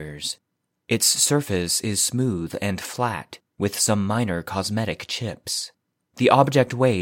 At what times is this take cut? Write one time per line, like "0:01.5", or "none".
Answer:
0:06.0